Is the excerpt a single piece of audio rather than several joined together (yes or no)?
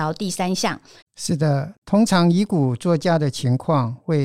no